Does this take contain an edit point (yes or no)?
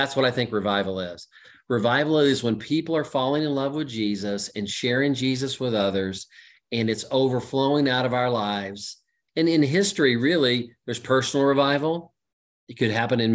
yes